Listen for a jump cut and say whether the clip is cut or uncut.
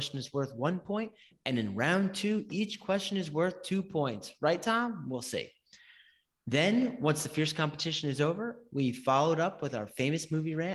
uncut